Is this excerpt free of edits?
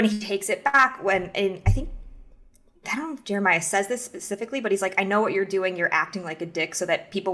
yes; 0 cuts

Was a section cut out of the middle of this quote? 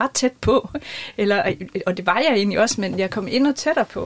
no; 0 cuts

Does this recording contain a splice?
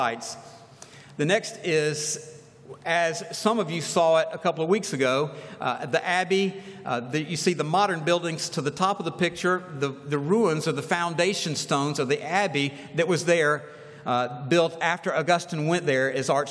no; 0 cuts

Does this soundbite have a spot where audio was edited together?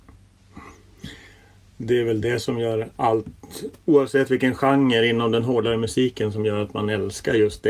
no; 0 cuts

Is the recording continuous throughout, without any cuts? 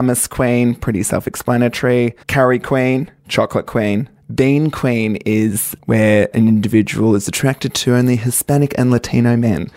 no; 2 cuts; at 2.2 s, 4.2 s

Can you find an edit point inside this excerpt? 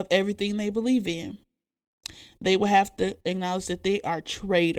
no; 0 cuts

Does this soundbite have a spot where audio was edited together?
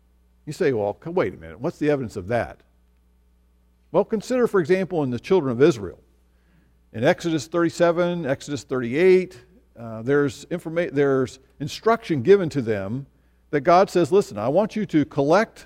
no; 0 cuts

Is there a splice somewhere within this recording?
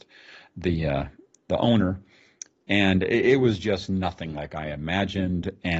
no; 0 cuts

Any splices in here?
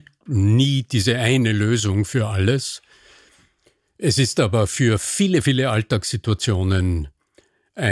no; 0 cuts

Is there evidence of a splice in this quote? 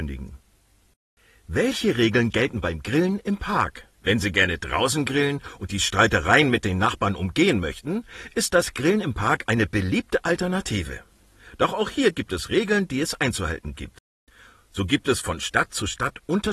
yes; 1 cut; at 3.9 s

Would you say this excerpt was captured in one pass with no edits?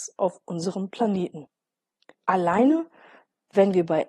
no; 1 cut; at 2.1 s

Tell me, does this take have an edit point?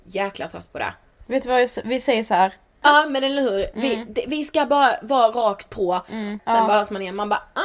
yes; 2 cuts; at 2.8 s, 6.4 s

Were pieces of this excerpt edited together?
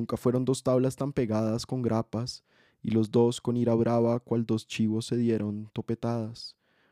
no; 0 cuts

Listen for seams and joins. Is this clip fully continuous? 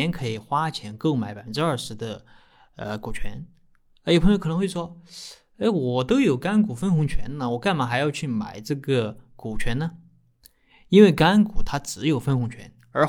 yes; 0 cuts

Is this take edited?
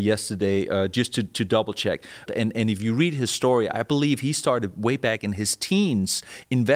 yes; 1 cut; at 2.3 s

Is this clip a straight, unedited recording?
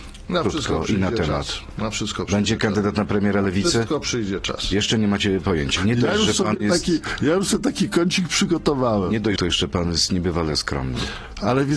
no; 2 cuts; at 5.8 s, 9.4 s

